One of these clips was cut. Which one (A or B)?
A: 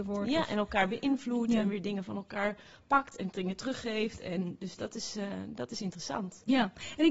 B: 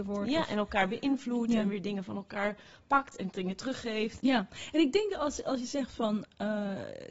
B